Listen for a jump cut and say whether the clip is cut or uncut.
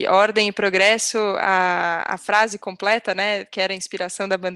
uncut